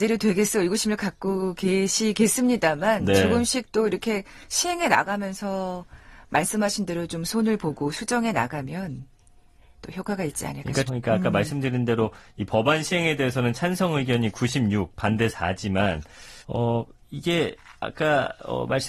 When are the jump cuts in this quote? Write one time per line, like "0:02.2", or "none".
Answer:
0:10.9
0:16.4